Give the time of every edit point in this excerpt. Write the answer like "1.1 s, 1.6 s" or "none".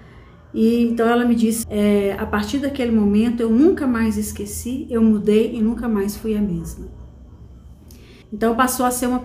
1.6 s, 8.2 s